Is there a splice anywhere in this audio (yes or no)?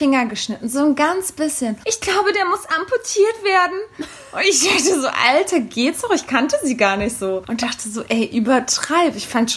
yes